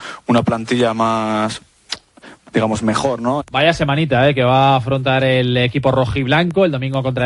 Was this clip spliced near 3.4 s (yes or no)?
yes